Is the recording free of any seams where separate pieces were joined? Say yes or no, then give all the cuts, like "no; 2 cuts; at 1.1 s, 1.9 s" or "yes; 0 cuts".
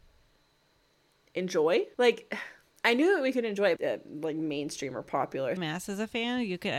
no; 3 cuts; at 1.9 s, 3.8 s, 5.6 s